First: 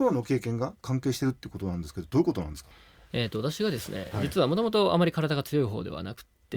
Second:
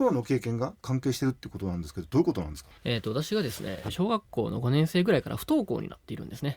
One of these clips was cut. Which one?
second; 2 cuts; at 2.8 s, 3.9 s

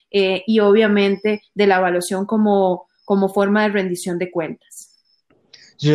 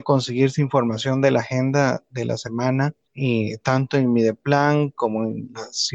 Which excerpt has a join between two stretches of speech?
second; 1 cut; at 3.0 s

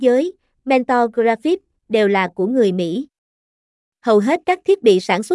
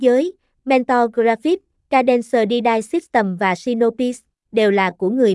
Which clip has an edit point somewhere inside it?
first; 1 cut; at 1.8 s

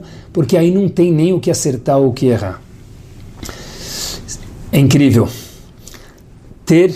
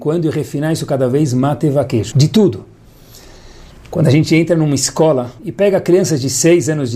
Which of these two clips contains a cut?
second; 2 cuts; at 2.1 s, 5.4 s

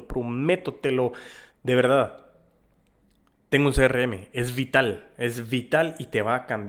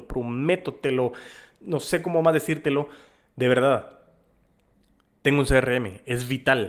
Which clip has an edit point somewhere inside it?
first; 1 cut; at 1.5 s

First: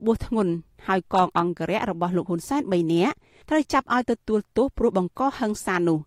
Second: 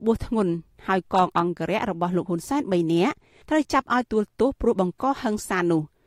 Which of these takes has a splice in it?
second; 1 cut; at 4.0 s

